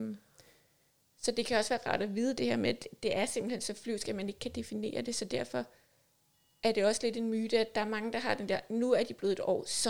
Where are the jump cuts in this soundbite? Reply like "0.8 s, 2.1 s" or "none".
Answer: none